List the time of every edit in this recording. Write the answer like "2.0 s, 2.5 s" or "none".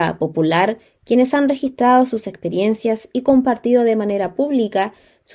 none